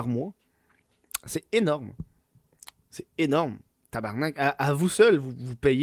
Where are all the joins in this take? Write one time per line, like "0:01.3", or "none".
none